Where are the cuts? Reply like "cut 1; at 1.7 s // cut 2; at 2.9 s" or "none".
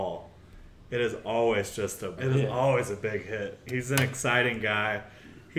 cut 1; at 2.2 s